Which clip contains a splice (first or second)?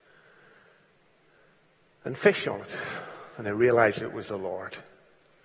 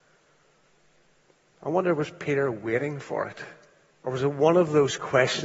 second